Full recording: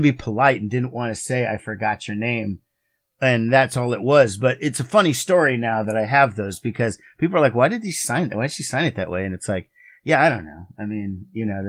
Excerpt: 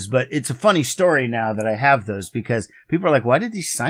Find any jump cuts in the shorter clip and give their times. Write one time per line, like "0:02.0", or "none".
none